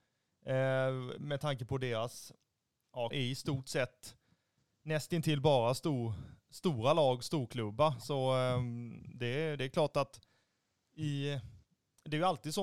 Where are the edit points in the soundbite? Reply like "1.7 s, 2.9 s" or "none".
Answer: 3.1 s